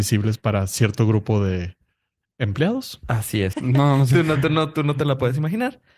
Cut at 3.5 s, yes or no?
yes